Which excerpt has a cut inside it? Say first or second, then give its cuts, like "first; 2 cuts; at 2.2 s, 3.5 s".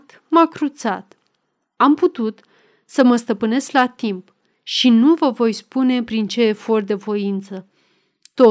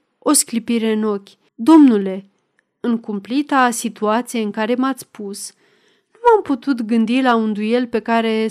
second; 1 cut; at 1.5 s